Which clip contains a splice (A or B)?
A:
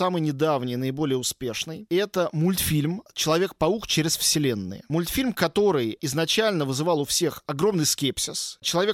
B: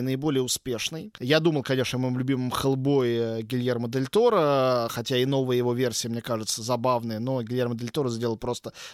B